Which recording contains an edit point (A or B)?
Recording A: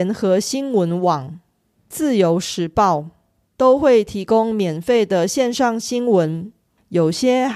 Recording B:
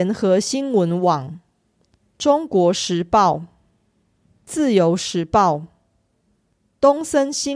A